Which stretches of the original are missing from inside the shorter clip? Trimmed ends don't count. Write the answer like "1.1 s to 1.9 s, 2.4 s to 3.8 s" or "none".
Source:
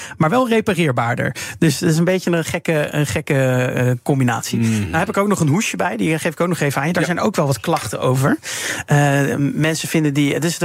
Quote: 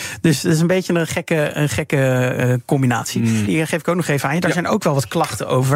4.8 s to 6.0 s